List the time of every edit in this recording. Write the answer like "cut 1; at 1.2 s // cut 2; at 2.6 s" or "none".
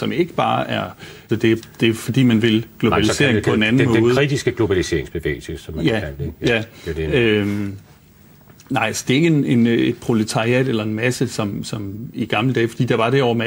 cut 1; at 1.3 s